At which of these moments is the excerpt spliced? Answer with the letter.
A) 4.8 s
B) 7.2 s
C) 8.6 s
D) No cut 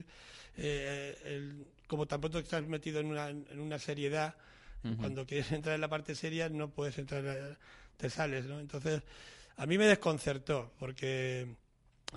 A